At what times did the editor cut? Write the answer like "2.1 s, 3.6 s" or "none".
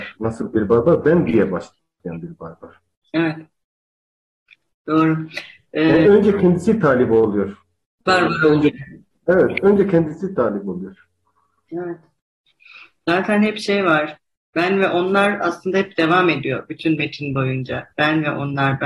none